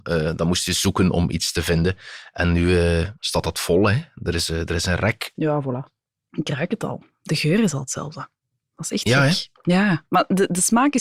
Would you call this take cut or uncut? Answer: cut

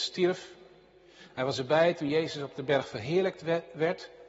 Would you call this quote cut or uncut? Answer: uncut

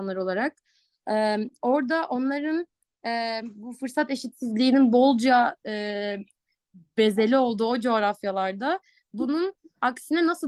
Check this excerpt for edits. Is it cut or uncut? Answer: uncut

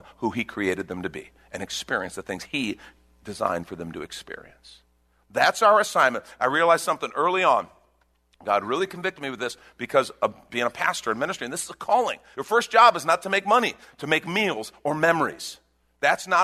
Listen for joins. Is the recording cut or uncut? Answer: cut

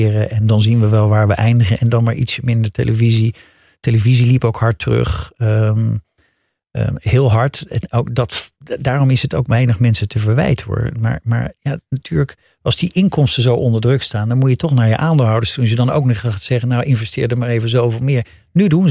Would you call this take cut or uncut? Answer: uncut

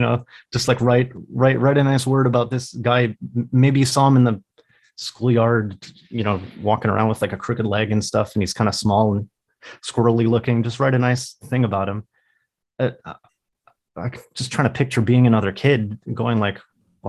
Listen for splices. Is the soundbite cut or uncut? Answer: uncut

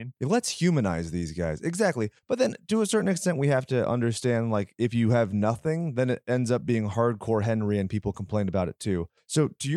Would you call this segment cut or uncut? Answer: uncut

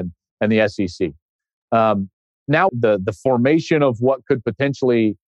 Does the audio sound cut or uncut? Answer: cut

